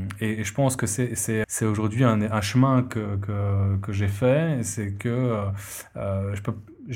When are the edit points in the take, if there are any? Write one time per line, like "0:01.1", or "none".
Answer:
0:01.4